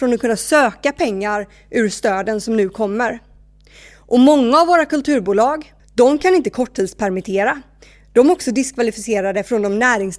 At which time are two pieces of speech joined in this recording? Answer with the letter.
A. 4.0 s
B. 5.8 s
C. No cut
B